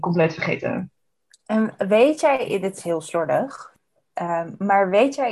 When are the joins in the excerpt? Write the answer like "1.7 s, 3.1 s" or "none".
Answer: none